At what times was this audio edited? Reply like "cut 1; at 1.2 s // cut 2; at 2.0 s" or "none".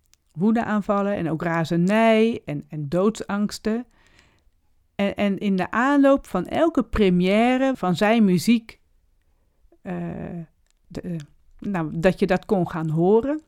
cut 1; at 7.7 s // cut 2; at 10.8 s

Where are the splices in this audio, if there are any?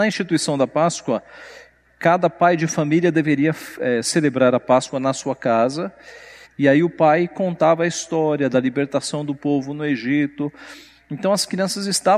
cut 1; at 6.5 s

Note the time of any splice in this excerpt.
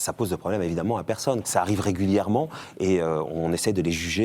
cut 1; at 1.4 s

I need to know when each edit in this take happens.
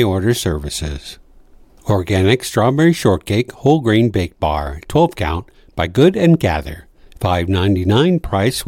cut 1; at 1.8 s // cut 2; at 7.1 s

